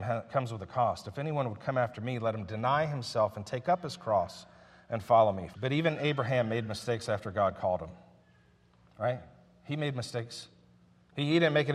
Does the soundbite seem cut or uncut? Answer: cut